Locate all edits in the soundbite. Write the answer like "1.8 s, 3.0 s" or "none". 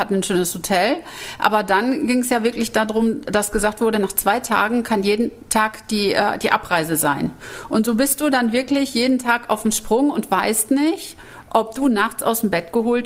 none